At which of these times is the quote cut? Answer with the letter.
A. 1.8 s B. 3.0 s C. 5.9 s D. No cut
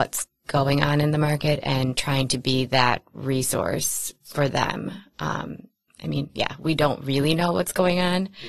C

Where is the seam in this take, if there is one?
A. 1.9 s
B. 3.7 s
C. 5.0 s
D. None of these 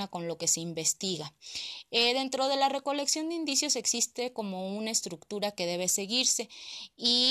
D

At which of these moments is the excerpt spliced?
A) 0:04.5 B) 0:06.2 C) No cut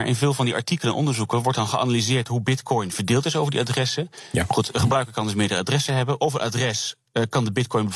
C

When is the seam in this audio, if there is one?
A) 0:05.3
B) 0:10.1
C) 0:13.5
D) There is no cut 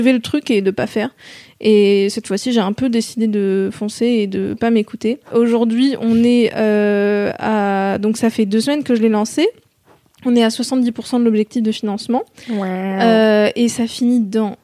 A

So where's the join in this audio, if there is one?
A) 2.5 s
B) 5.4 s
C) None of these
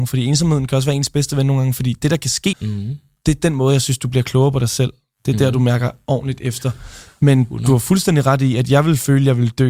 A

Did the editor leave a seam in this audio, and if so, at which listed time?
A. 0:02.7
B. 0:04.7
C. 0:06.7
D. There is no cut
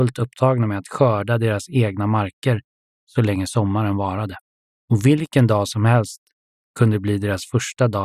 B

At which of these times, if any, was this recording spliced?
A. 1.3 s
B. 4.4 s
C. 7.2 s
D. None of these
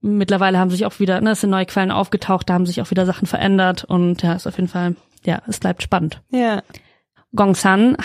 C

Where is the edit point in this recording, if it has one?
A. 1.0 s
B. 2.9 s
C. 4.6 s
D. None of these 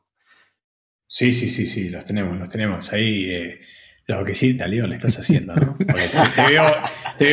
C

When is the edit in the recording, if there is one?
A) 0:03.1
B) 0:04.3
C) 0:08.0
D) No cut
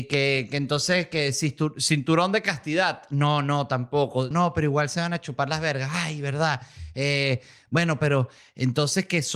B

